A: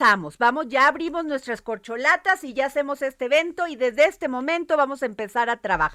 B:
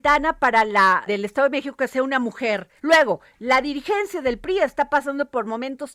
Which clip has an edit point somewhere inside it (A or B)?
B